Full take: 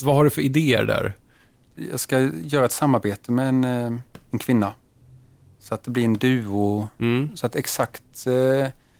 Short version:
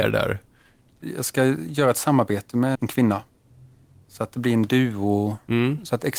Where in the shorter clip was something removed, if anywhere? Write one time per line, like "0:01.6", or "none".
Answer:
0:02.7